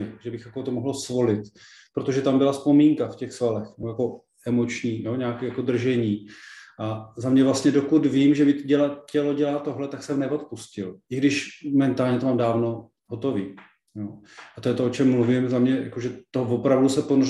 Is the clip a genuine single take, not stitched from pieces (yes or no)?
yes